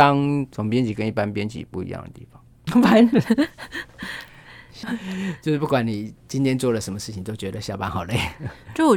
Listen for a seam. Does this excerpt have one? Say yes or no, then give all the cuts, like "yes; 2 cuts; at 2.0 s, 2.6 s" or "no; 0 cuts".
yes; 2 cuts; at 2.7 s, 4.8 s